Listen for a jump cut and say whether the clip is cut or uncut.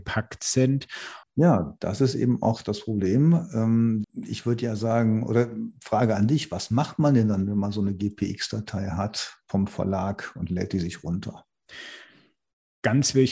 cut